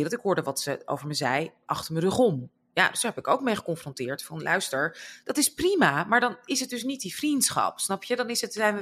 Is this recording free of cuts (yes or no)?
yes